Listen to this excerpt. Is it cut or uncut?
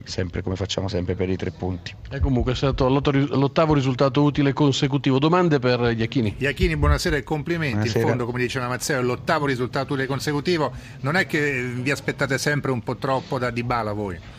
uncut